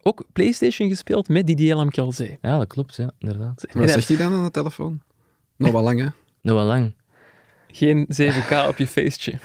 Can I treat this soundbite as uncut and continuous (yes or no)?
no